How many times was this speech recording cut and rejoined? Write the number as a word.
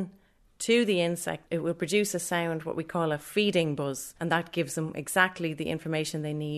zero